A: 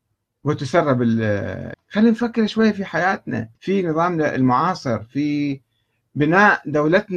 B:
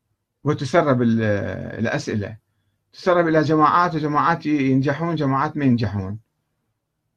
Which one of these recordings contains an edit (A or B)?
A